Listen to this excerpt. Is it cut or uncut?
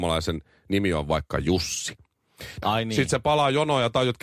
cut